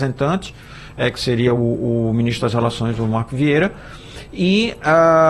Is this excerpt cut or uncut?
uncut